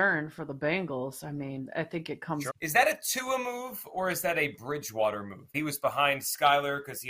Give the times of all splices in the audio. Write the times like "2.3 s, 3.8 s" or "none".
2.5 s, 5.5 s